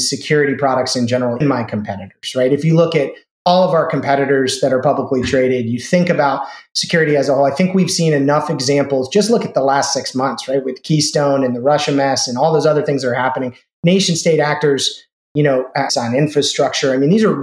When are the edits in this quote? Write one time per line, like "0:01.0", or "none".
0:01.4
0:15.9